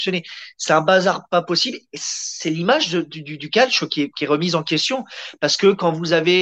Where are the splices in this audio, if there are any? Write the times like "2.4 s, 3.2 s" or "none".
4.1 s